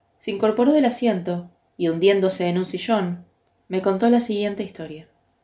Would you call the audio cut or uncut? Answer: cut